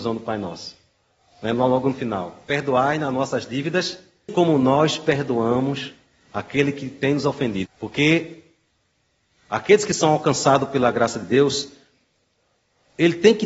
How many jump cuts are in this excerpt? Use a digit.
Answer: 2